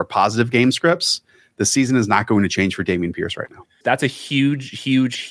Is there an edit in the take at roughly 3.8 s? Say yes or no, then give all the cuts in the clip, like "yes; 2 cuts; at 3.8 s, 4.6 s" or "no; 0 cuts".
yes; 1 cut; at 3.8 s